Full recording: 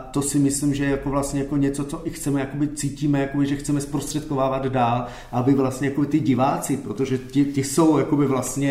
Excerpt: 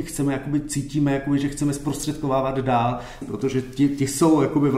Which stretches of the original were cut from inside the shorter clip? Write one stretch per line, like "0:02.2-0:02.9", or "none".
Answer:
0:05.3-0:06.8